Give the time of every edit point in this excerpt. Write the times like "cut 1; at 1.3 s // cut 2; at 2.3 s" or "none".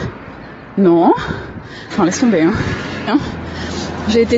cut 1; at 1.9 s // cut 2; at 3.1 s